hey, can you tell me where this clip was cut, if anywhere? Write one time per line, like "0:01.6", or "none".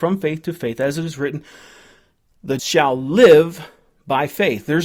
0:02.6